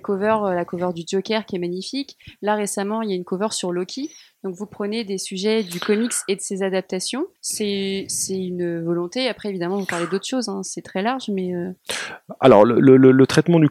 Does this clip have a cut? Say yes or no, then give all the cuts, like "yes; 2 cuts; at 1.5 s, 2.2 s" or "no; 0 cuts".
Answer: yes; 1 cut; at 7.4 s